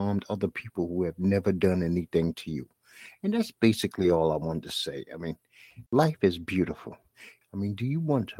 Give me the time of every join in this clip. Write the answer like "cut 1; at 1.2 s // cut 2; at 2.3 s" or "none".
cut 1; at 5.9 s // cut 2; at 7.4 s